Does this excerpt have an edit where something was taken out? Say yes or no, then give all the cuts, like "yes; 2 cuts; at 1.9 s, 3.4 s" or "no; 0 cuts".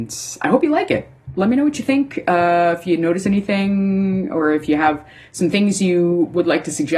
no; 0 cuts